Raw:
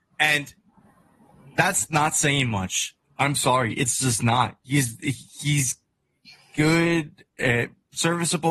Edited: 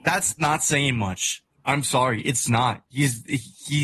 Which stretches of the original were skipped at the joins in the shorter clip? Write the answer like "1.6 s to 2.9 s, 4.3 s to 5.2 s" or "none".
4.0 s to 4.2 s